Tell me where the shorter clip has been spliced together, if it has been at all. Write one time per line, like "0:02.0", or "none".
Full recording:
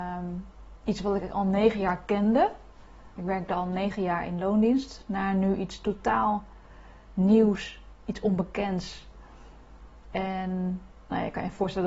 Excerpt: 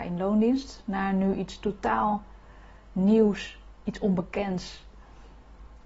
none